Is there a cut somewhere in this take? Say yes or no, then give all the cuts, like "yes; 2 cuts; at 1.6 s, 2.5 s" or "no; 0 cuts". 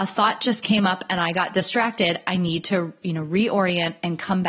no; 0 cuts